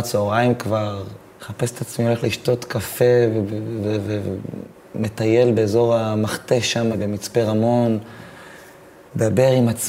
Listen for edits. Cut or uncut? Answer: uncut